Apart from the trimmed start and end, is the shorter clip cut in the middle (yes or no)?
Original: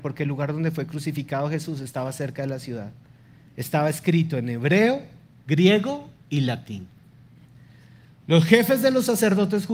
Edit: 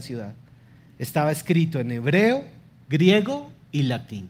no